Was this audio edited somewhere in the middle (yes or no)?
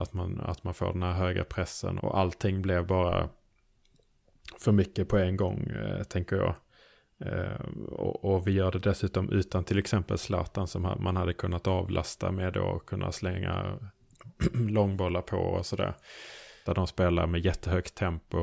yes